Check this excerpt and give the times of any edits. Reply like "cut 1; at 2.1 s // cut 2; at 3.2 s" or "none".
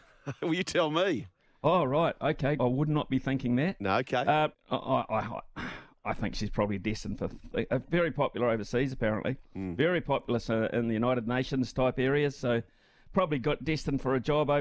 cut 1; at 2.6 s // cut 2; at 4.5 s